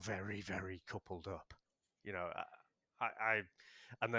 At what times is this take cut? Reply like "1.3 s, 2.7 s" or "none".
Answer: none